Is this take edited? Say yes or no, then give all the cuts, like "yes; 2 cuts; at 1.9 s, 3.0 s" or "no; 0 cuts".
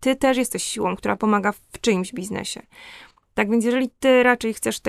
no; 0 cuts